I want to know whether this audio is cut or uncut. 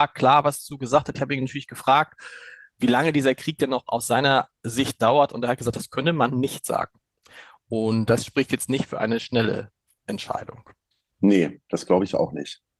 uncut